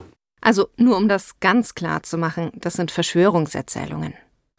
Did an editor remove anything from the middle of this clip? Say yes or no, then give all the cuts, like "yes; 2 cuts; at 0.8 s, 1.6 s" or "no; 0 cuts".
no; 0 cuts